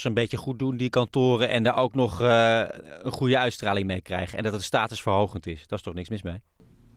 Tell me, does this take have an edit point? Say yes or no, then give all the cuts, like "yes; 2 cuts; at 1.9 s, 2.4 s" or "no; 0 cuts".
no; 0 cuts